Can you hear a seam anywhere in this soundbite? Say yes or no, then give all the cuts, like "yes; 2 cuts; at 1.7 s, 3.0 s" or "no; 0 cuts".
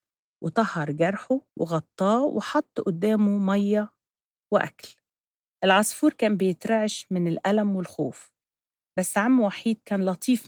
yes; 1 cut; at 1.5 s